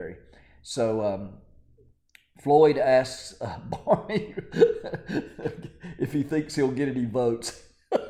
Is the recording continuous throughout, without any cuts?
yes; 0 cuts

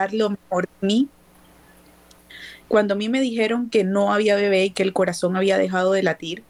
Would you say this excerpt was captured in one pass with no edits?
no; 1 cut; at 2.6 s

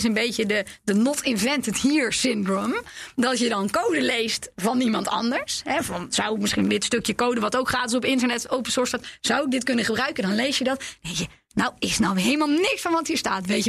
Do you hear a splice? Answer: no; 0 cuts

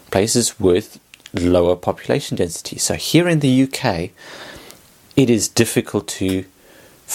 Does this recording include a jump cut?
no; 0 cuts

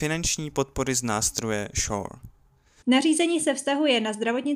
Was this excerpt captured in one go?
no; 1 cut; at 2.8 s

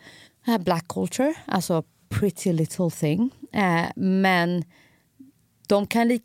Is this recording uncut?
yes; 0 cuts

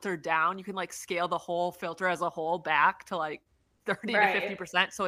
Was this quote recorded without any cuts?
yes; 0 cuts

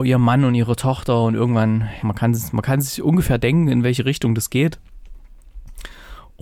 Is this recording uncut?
no; 1 cut; at 2.0 s

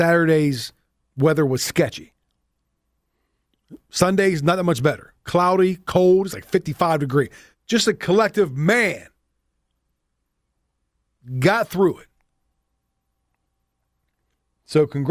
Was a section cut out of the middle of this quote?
yes; 1 cut; at 7.5 s

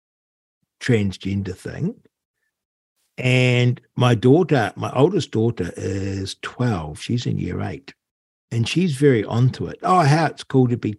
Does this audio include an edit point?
yes; 1 cut; at 9.8 s

